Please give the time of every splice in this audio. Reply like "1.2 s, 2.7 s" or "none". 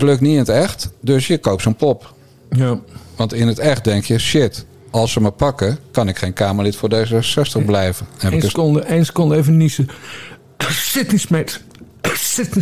none